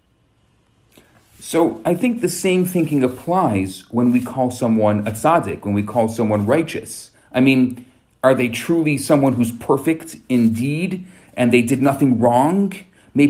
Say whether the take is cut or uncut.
uncut